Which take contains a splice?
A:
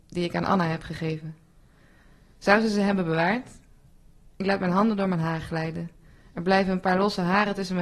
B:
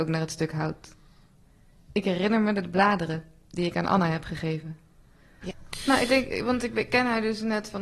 B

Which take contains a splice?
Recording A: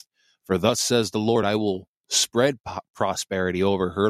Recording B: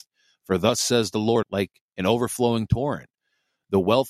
B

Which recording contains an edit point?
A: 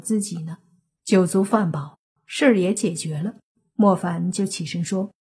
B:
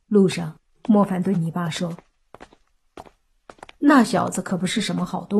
A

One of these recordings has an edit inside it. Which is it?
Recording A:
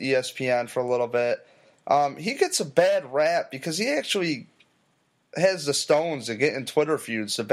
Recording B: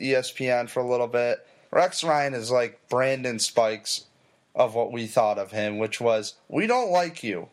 B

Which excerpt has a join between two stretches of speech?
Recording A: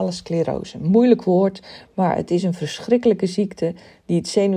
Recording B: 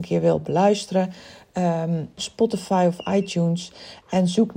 B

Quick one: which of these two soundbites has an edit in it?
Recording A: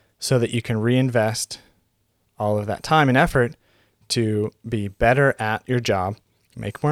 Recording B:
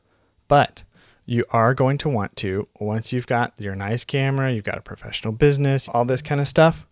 B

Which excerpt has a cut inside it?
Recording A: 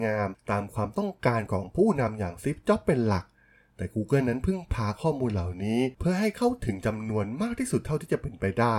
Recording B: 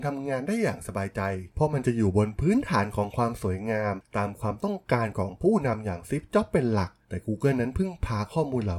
B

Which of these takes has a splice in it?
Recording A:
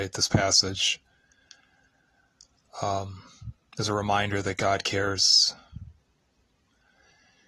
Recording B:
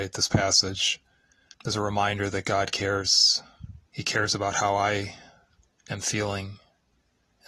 B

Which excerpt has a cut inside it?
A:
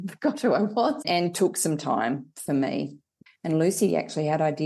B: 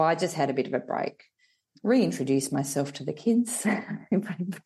A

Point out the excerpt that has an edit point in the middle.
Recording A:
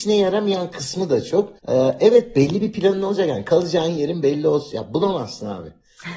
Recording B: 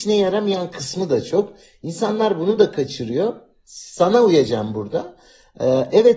A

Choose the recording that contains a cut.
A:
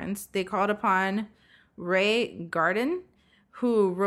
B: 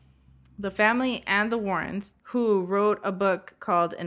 B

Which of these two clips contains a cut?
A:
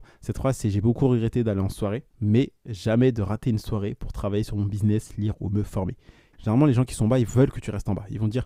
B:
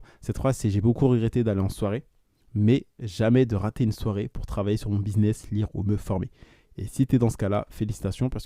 A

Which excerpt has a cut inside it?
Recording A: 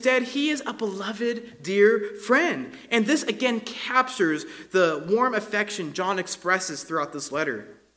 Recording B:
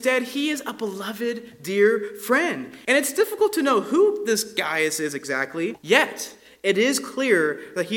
B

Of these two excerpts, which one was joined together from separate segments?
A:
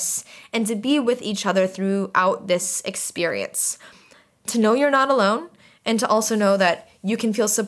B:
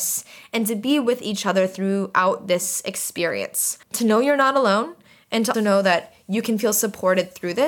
B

